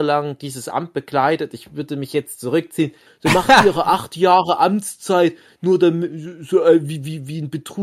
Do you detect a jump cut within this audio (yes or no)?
yes